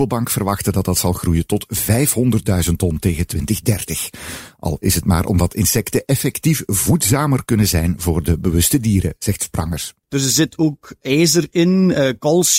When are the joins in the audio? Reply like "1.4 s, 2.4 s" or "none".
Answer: 10.0 s